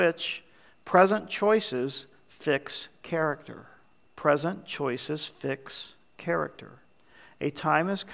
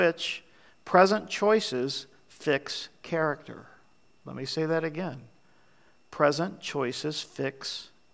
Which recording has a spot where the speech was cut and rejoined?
first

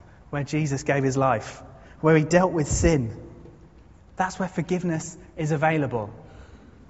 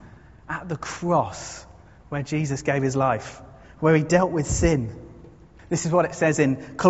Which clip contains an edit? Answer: second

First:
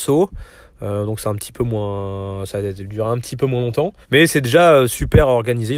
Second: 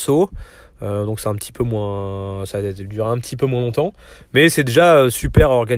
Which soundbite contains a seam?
first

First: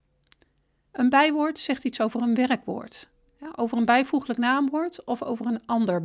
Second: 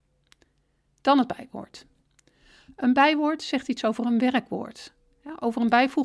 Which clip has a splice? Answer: first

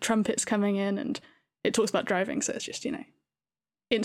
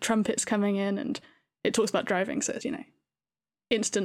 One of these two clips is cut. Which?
second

